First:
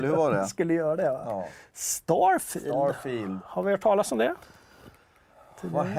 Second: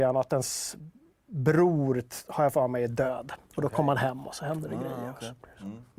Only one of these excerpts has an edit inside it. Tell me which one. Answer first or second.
second